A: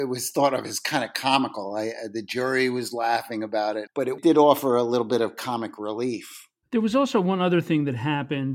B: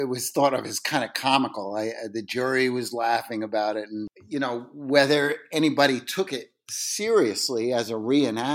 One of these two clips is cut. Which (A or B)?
A